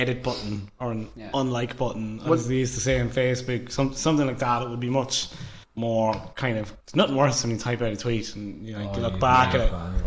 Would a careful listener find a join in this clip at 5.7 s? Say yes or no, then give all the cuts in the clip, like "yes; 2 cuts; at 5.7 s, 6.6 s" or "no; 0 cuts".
yes; 2 cuts; at 5.7 s, 6.8 s